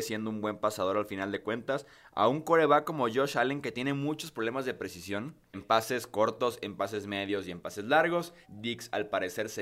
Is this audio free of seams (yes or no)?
no